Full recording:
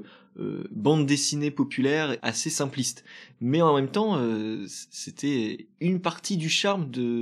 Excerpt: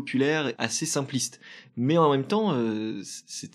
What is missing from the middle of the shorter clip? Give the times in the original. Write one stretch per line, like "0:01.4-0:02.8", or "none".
none